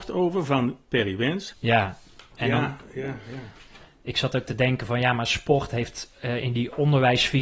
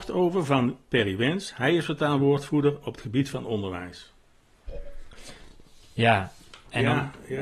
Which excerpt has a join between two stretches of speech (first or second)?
first